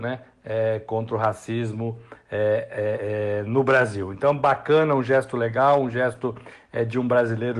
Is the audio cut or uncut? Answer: uncut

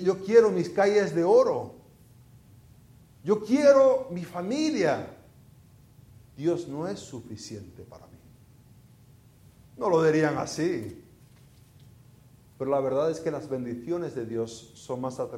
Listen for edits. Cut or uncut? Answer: uncut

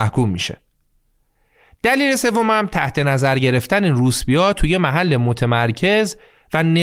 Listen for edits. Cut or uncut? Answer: uncut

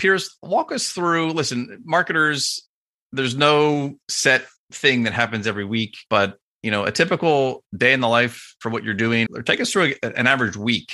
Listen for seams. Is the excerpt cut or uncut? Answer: cut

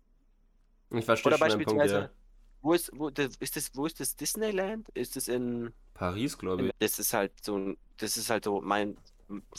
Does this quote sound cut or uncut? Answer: cut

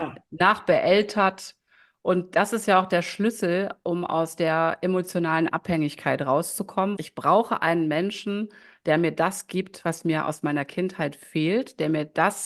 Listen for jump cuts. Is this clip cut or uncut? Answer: cut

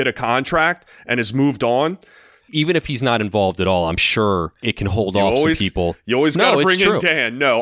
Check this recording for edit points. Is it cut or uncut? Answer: cut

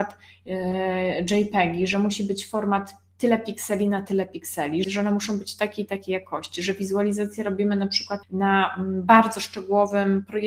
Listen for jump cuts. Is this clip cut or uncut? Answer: cut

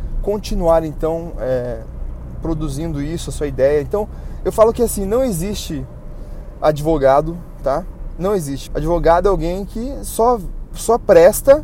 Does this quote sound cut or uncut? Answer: cut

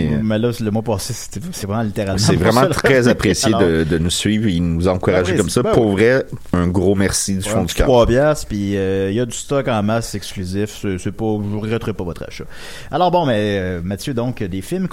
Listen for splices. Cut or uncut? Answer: uncut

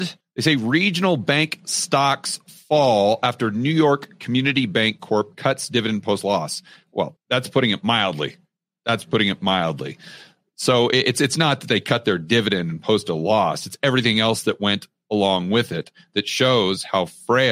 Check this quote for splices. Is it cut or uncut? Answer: uncut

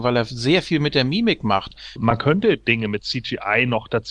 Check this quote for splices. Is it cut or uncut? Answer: cut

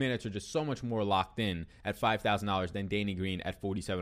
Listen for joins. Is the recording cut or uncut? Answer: uncut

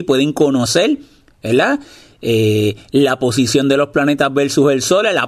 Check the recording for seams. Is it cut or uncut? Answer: uncut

